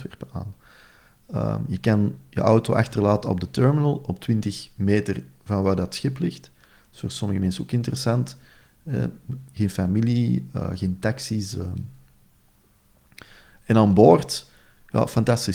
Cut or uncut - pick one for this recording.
uncut